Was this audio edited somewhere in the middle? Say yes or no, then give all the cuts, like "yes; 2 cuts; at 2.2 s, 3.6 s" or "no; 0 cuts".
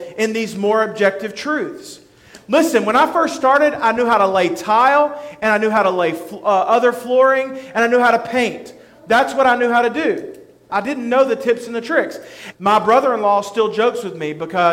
yes; 2 cuts; at 10.7 s, 12.5 s